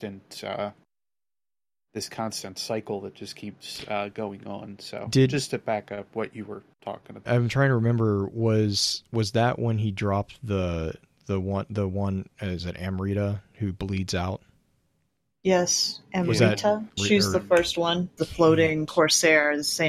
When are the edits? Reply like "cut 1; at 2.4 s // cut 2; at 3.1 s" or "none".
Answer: cut 1; at 7.3 s // cut 2; at 17.0 s // cut 3; at 18.2 s